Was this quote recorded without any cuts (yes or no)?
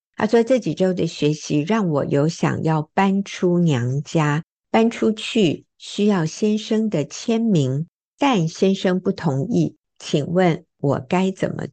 yes